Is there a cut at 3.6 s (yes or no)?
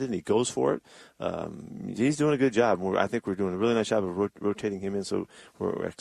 no